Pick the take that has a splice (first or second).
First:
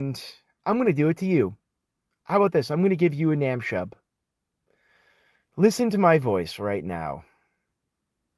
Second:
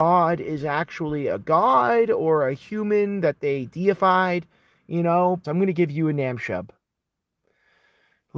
second